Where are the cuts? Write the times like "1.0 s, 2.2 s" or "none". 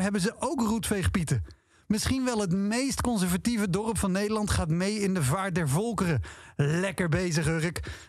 none